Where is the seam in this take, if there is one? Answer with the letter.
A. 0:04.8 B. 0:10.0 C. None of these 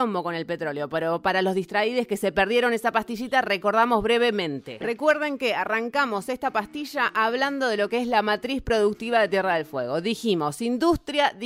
A